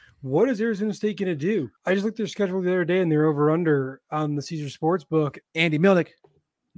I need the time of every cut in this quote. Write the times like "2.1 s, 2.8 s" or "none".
1.8 s, 5.4 s